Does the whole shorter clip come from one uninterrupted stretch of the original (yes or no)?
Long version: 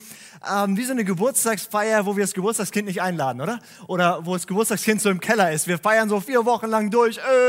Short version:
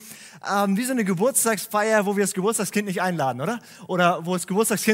yes